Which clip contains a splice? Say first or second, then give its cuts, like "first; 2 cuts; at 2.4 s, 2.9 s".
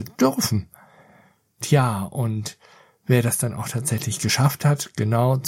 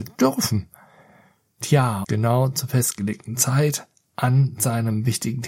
second; 1 cut; at 2.0 s